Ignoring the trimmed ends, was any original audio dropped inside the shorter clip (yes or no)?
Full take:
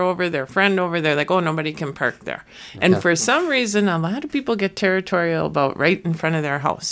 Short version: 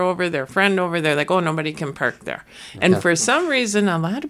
no